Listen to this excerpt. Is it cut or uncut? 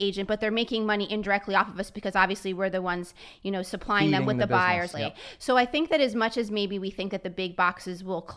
cut